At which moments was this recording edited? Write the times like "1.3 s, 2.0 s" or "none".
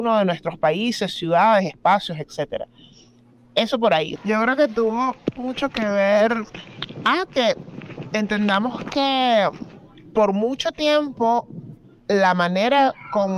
4.2 s